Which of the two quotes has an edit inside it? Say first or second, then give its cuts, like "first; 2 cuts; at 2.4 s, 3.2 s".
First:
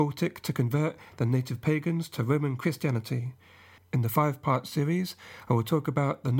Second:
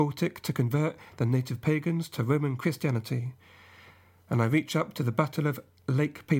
first; 1 cut; at 3.8 s